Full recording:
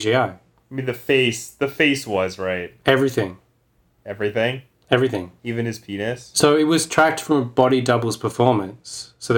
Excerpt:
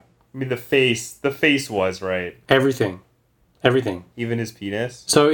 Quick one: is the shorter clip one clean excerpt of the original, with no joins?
no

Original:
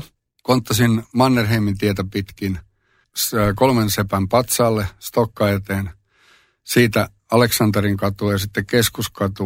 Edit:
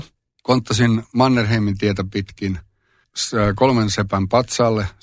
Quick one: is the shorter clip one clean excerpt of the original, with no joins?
yes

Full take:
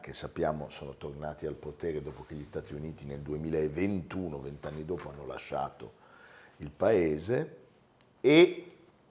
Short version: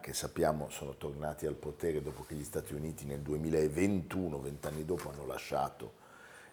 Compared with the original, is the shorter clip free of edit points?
yes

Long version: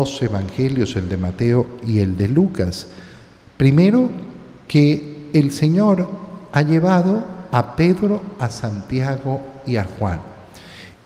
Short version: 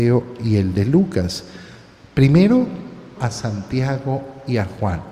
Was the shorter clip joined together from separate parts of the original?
yes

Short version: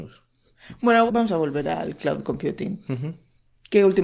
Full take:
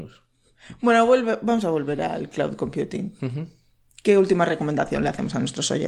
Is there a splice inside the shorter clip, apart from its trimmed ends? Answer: yes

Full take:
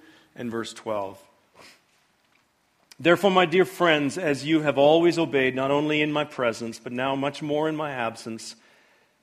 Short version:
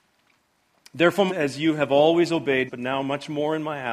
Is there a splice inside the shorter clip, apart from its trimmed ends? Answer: yes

